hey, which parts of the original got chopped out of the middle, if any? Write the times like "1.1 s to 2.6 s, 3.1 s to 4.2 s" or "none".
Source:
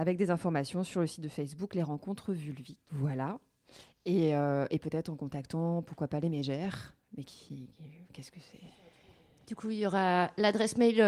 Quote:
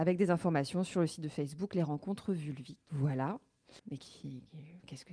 3.8 s to 7.1 s

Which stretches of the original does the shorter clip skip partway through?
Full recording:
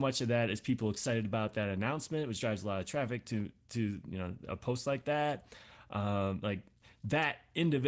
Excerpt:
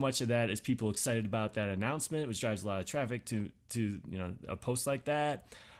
none

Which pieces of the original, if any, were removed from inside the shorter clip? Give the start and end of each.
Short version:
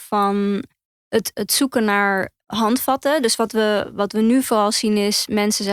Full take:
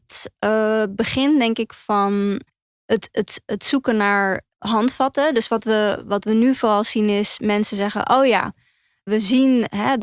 3.1 s to 3.5 s

